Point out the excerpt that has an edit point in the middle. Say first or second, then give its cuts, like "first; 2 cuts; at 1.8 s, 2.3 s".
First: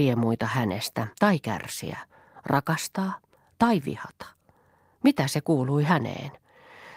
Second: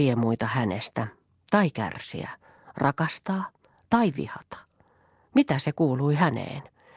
first; 1 cut; at 1.1 s